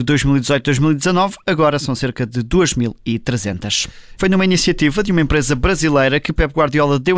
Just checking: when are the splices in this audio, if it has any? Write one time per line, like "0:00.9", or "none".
0:04.2